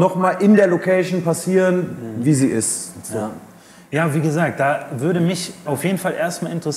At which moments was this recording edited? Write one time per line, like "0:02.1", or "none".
0:05.7